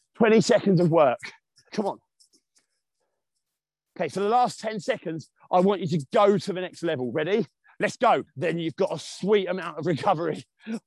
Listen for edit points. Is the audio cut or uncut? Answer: cut